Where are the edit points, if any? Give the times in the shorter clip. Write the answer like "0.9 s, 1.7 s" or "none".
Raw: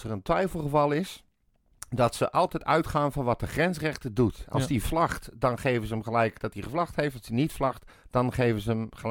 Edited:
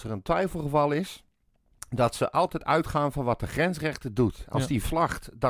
none